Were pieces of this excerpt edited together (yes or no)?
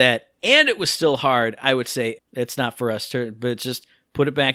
yes